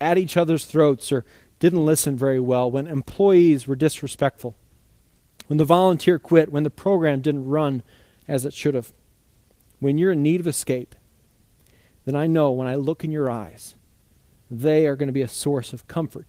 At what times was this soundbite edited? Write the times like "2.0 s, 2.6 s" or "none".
none